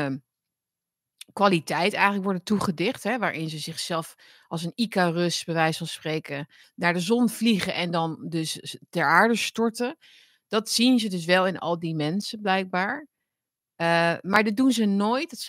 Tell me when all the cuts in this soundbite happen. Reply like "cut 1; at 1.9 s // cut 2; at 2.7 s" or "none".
cut 1; at 6.6 s